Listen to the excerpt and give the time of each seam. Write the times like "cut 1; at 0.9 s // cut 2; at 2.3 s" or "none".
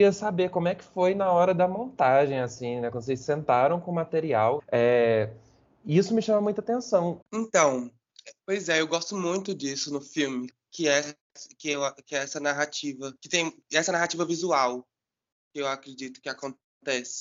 cut 1; at 4.6 s // cut 2; at 7.2 s // cut 3; at 13.2 s